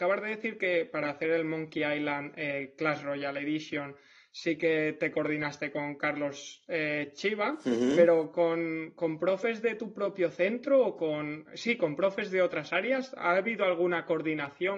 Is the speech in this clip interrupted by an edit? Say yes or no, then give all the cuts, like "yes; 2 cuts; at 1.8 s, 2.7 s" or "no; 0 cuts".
no; 0 cuts